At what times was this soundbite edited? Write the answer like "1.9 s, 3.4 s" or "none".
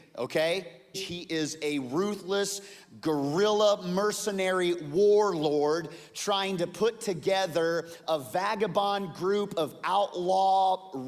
0.9 s, 8.1 s